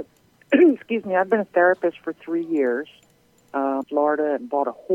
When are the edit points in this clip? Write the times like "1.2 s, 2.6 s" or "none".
3.8 s